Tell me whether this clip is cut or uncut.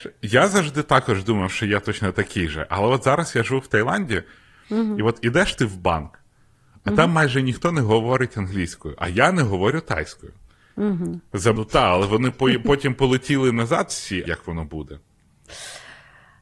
cut